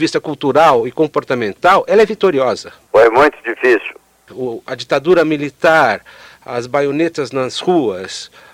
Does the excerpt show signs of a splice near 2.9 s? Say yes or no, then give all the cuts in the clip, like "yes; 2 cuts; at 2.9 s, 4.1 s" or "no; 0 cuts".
yes; 2 cuts; at 2.9 s, 4.3 s